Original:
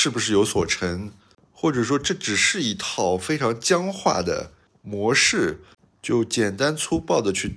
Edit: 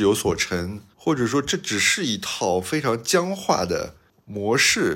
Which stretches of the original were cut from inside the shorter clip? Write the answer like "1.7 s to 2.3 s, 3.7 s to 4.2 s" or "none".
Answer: 1.2 s to 1.5 s